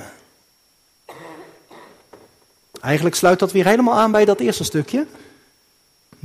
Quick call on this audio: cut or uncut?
uncut